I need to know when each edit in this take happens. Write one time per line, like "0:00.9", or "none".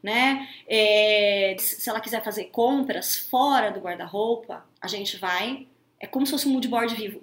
0:01.6
0:04.7